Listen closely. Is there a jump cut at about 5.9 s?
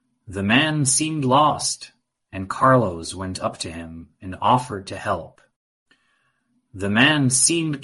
no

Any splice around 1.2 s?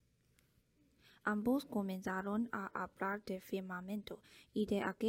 yes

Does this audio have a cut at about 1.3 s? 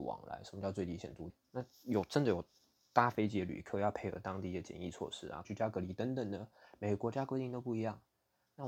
yes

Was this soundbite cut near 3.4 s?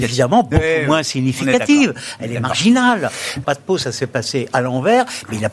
yes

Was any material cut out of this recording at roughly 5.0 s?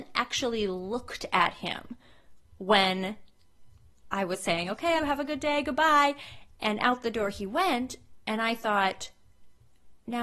yes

